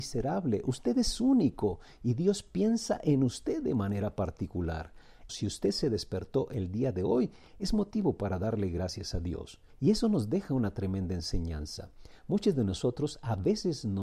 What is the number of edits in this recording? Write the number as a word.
two